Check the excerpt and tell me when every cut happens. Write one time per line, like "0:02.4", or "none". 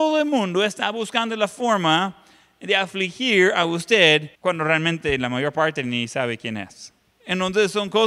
0:04.3